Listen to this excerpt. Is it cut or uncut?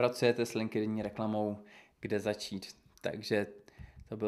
cut